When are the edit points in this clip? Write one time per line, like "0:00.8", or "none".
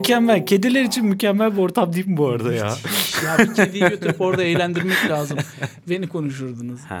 0:05.8